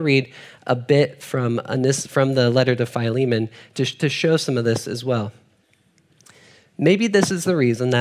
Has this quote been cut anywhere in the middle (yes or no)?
no